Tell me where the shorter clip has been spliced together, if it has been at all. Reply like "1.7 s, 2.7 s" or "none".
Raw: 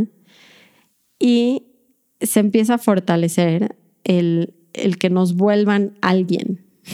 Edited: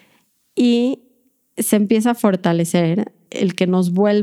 3.3 s

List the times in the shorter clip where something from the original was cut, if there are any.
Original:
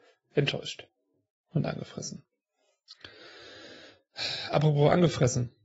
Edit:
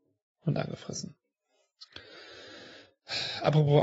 none

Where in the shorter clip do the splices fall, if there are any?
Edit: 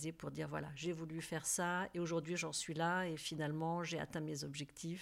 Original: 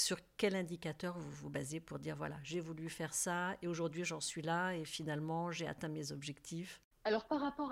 none

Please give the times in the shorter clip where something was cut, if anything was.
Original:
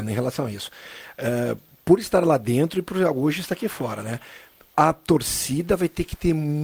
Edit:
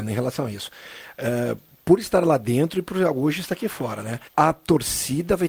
4.3 s

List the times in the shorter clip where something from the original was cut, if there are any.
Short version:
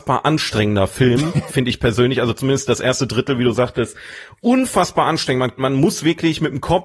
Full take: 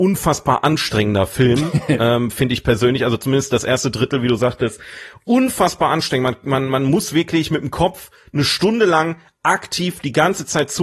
1.5 s, 5.6 s

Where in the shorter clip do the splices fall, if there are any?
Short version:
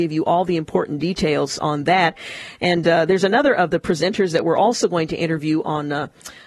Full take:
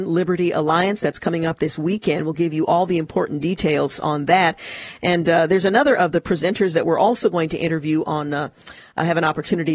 none

